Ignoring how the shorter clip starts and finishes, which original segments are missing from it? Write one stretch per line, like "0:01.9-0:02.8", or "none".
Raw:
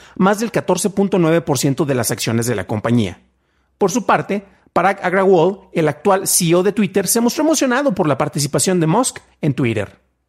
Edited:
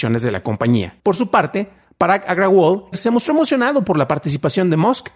0:03.2-0:03.8
0:05.7-0:07.0